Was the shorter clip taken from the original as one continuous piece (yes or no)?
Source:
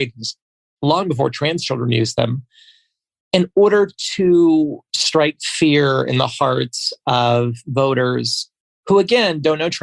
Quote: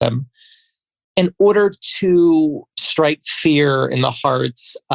yes